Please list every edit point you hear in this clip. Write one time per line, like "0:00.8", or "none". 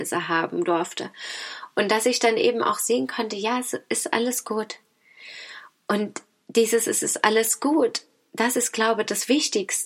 none